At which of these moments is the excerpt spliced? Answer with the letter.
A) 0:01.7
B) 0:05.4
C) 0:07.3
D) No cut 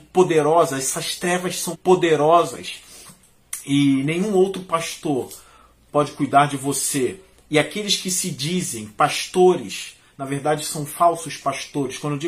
A